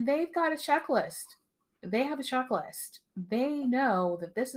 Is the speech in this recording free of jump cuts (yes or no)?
yes